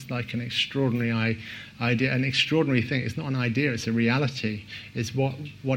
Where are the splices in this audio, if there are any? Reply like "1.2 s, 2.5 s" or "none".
none